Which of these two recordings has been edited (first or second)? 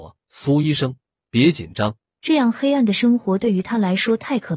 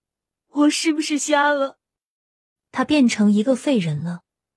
first